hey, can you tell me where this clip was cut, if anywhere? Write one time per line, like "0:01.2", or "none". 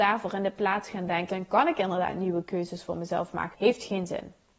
0:01.3
0:03.5